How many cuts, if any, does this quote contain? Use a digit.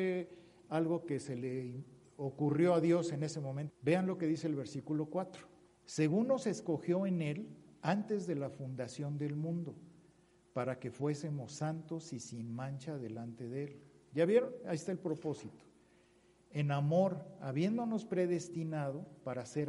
2